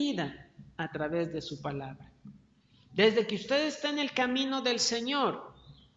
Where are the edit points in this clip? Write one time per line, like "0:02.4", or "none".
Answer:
none